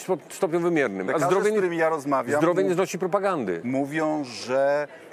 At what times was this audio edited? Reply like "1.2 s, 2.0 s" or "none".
none